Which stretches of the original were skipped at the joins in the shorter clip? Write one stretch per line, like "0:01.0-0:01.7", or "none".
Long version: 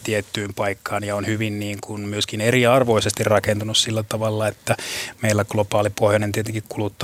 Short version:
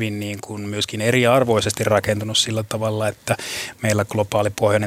none